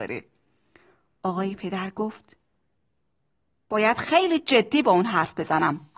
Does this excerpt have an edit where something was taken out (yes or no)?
no